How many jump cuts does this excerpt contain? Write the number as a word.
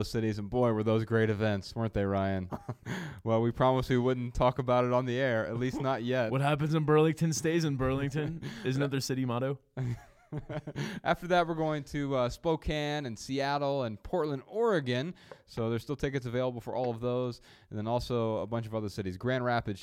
one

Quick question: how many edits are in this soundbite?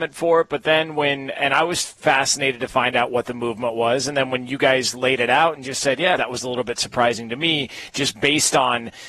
one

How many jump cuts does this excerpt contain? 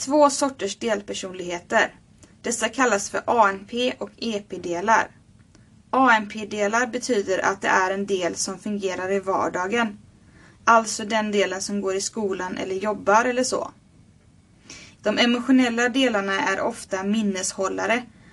one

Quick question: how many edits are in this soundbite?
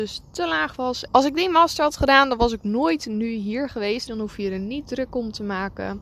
two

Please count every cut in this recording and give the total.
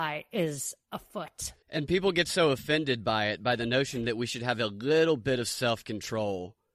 one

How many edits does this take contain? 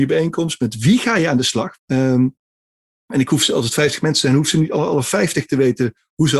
one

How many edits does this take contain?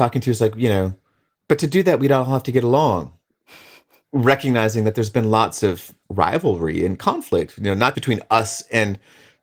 two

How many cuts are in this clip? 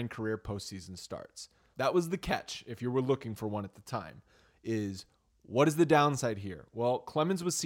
one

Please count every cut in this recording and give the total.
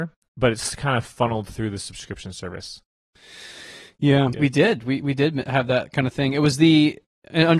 one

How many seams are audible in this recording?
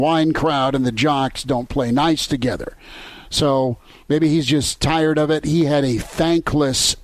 zero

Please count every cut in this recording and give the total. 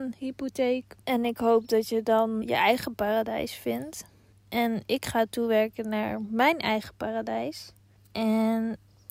two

